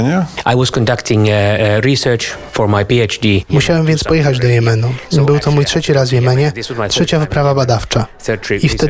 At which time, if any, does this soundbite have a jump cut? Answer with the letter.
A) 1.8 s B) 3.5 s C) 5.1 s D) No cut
B